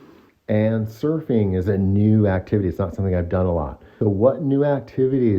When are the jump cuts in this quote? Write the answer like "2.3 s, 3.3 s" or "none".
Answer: 4.0 s